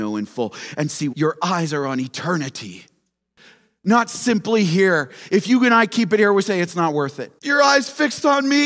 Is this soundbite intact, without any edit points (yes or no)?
no